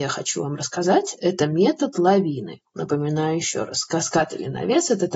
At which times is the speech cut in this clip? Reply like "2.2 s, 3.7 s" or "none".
2.7 s